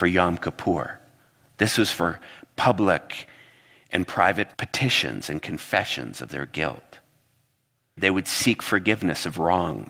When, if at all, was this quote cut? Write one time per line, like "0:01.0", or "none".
0:04.5
0:08.0